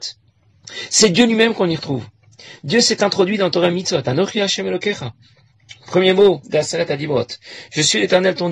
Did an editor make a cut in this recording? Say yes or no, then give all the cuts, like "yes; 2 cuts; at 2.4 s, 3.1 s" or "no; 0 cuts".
no; 0 cuts